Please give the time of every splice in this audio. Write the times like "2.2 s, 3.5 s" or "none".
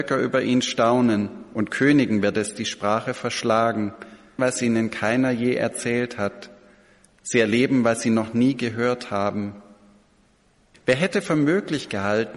4.4 s, 10.7 s